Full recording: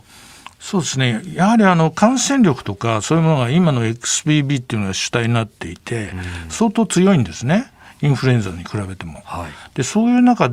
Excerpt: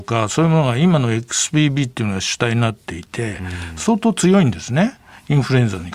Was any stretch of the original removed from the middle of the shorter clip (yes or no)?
no